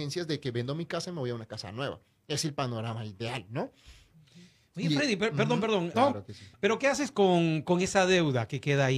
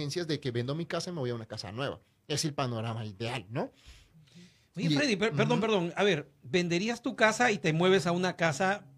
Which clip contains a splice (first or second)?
first